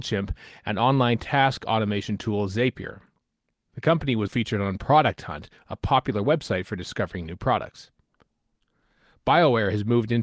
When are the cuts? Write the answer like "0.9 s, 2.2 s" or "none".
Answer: 4.3 s